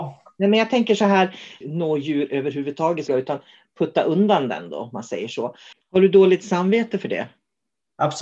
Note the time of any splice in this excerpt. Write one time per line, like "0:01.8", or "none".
0:01.6
0:03.1
0:05.7

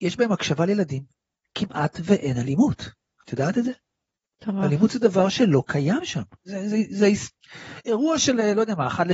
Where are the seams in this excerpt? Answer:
0:06.4

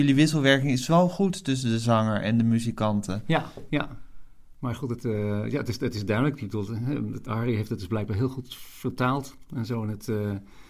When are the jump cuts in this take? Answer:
0:03.7
0:07.3

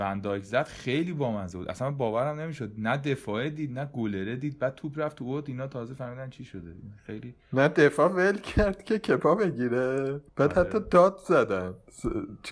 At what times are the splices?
0:10.3

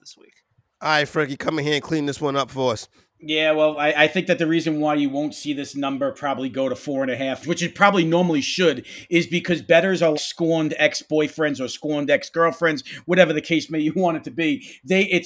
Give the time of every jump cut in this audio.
0:07.4
0:10.1

